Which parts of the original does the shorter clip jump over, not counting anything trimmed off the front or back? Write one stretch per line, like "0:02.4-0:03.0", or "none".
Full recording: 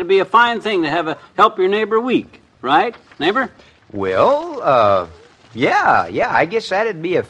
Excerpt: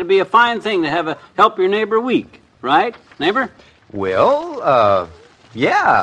none